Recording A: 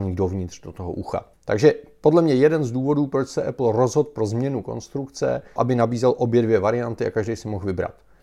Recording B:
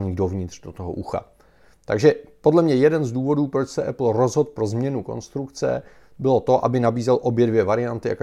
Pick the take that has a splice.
A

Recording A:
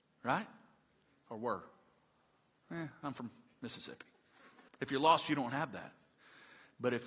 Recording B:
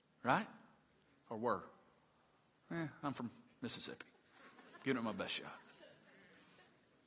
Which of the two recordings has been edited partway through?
A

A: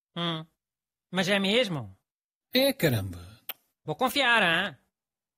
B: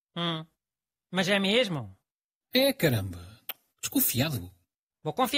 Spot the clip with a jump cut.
A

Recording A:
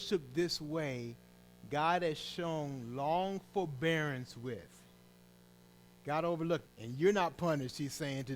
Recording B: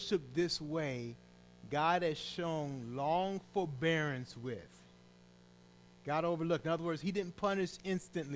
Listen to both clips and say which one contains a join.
A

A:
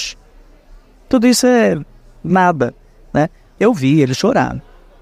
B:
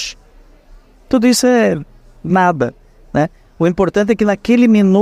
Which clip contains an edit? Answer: A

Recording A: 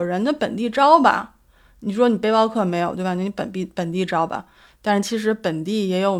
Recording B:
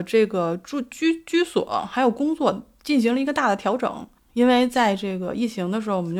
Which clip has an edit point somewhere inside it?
B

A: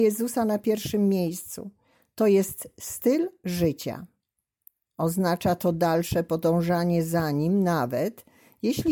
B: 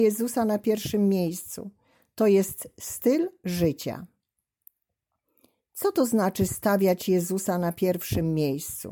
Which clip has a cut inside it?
A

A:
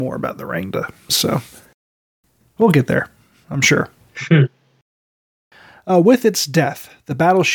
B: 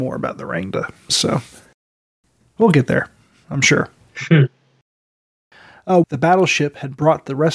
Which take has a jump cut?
B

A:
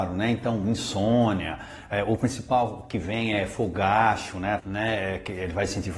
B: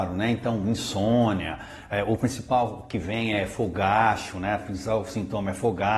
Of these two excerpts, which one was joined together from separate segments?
A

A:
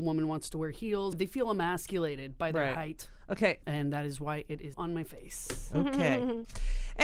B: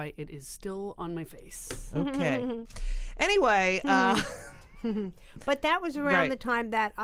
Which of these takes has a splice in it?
A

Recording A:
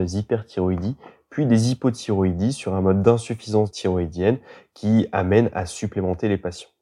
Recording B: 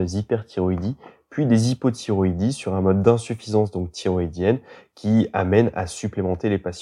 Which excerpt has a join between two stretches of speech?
A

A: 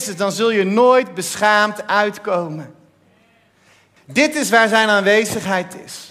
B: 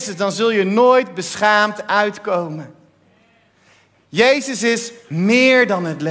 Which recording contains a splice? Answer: A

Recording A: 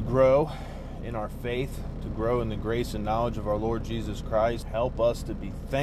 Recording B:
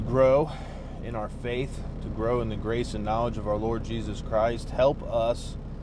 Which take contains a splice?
A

